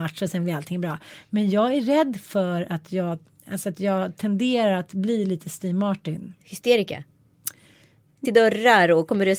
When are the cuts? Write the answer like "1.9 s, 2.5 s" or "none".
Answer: 8.2 s